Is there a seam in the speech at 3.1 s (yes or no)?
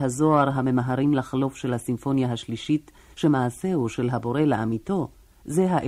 yes